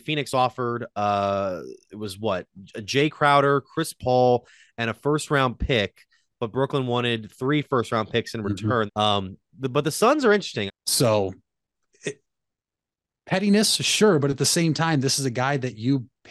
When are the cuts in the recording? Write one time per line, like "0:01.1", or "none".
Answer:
0:08.9
0:10.7